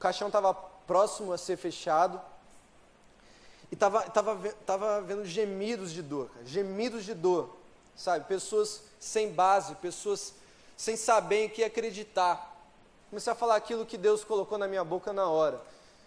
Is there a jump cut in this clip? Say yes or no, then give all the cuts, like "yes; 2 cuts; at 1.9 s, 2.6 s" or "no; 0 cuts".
yes; 1 cut; at 13.0 s